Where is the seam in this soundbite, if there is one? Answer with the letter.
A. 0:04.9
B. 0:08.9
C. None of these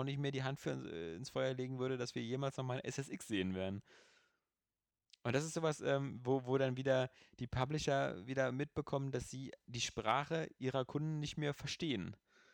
C